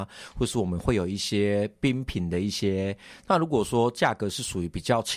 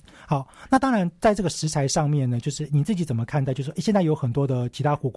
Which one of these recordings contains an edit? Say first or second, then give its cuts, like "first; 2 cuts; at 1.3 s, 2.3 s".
first; 1 cut; at 3.3 s